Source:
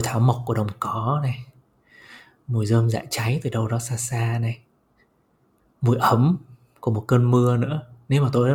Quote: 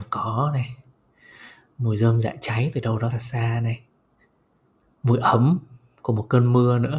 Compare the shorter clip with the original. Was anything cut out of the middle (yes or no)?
yes